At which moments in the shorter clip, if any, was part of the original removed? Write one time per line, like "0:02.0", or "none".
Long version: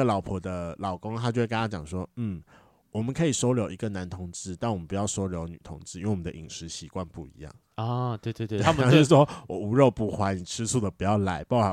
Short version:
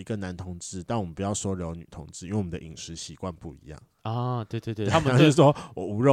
none